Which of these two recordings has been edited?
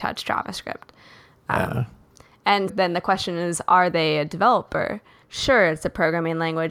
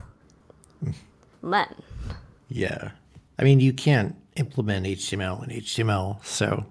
first; 2 cuts; at 2.7 s, 5.2 s

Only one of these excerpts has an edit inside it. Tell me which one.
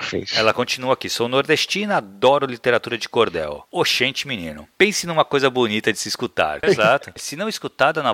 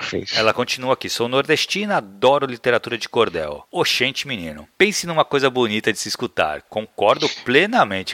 first; 1 cut; at 6.6 s

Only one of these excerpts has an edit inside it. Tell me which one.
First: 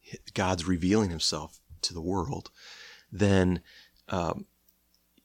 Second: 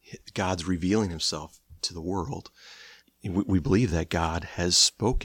second; 1 cut; at 3.0 s

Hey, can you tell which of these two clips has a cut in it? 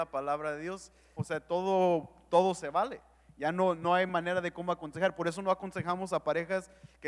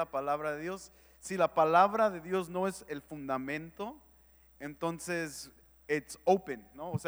first; 1 cut; at 1.2 s

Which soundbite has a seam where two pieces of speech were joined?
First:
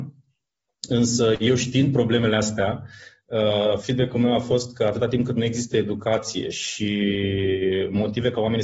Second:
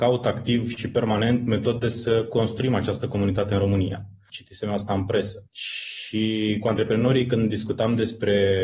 second; 2 cuts; at 4.3 s, 5.5 s

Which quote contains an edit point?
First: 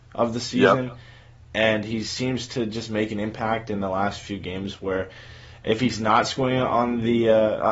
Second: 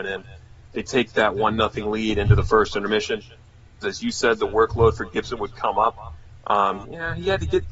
second; 2 cuts; at 3.8 s, 6.8 s

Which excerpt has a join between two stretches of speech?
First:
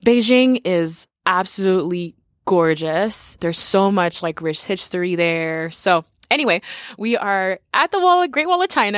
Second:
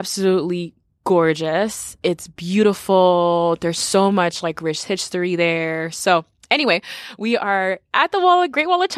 first; 1 cut; at 3.4 s

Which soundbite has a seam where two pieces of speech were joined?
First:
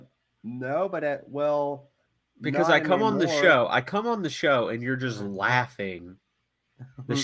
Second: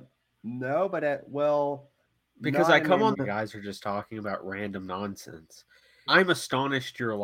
second; 2 cuts; at 3.1 s, 6.1 s

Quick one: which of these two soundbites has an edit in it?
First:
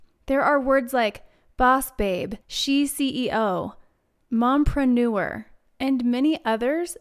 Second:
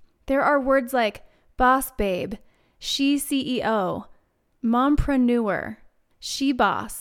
first; 2 cuts; at 2.4 s, 5.7 s

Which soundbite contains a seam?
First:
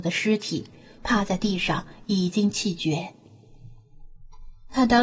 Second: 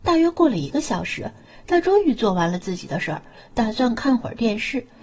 first; 1 cut; at 1.0 s

